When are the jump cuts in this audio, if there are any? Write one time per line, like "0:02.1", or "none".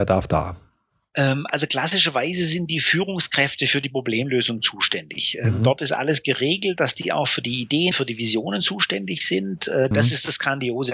0:07.9
0:09.9